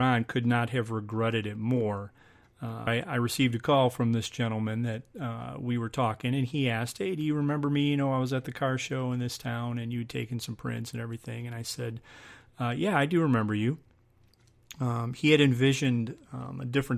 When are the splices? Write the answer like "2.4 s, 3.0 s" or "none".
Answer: 2.9 s